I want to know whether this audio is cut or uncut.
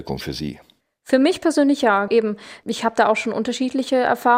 cut